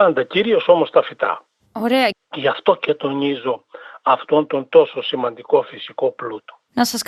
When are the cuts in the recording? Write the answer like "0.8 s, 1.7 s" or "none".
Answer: 2.1 s